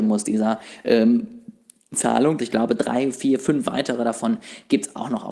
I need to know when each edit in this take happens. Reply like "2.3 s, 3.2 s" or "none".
2.4 s